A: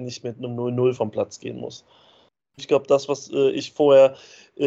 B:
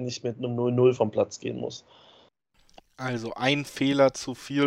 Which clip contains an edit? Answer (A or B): A